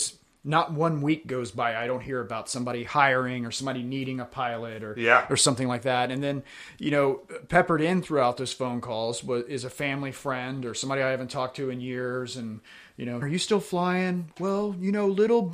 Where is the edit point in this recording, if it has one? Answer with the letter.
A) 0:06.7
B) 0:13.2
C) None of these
B